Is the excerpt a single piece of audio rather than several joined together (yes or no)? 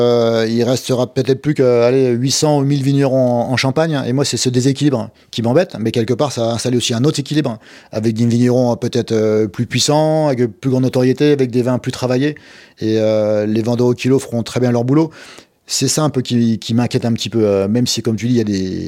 yes